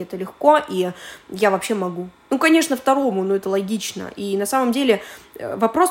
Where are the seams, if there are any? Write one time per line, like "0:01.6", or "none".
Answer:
none

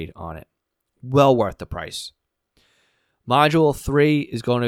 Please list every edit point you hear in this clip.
none

